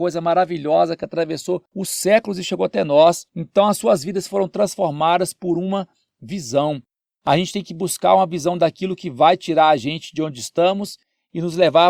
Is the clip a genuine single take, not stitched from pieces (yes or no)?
no